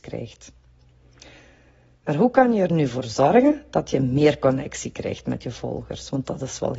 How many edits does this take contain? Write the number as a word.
zero